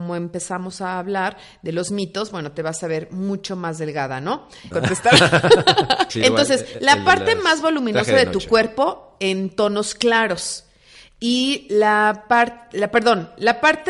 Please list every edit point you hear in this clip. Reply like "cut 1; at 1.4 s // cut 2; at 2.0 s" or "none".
cut 1; at 4.7 s // cut 2; at 6.1 s